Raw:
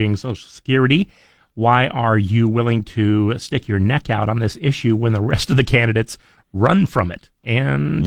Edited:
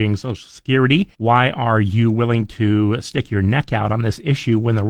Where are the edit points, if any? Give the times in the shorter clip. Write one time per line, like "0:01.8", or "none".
0:01.1